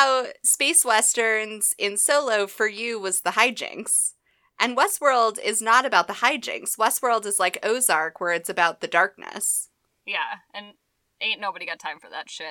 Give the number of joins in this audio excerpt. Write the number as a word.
zero